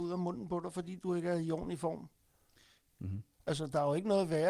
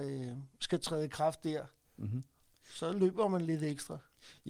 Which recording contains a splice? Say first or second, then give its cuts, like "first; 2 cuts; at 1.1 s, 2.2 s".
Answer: first; 1 cut; at 2.9 s